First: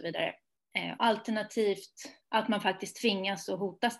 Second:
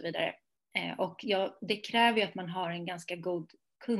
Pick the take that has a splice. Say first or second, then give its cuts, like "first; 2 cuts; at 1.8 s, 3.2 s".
first; 2 cuts; at 1.0 s, 2.2 s